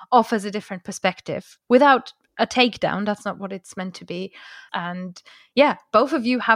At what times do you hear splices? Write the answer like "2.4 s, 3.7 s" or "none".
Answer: 4.7 s